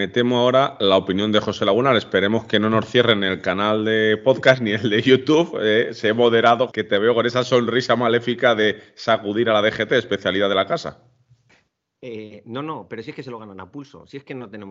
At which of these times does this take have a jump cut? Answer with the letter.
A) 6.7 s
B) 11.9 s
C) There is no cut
A